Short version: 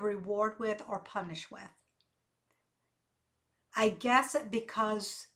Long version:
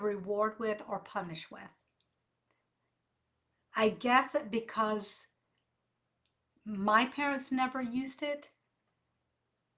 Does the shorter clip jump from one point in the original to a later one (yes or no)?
no